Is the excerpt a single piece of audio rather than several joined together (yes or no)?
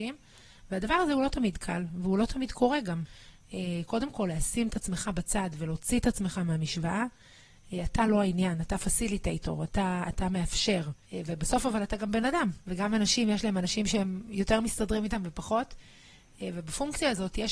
no